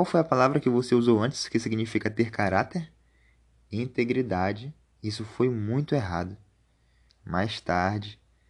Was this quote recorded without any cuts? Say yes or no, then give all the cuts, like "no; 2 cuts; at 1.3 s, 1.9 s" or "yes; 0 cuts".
no; 2 cuts; at 4.8 s, 7.1 s